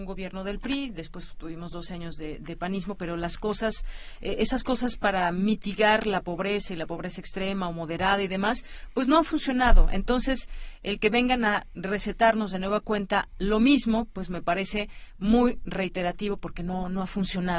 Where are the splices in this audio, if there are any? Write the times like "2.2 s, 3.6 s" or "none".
none